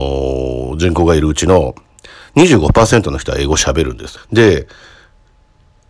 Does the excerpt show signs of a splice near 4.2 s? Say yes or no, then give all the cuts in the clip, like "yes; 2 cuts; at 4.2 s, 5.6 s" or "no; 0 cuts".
yes; 1 cut; at 4.2 s